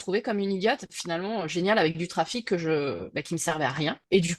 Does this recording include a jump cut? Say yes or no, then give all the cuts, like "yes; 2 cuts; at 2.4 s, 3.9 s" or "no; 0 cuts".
no; 0 cuts